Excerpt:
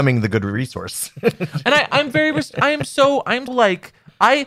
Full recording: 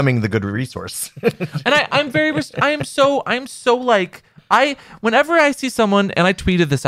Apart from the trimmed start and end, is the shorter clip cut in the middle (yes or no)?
yes